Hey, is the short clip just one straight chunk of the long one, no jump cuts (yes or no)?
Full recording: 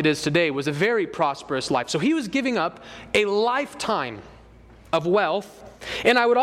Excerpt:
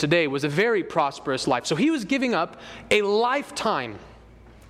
yes